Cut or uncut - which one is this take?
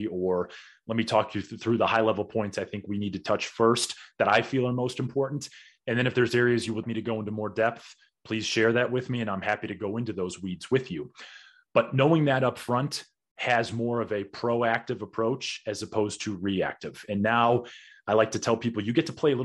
cut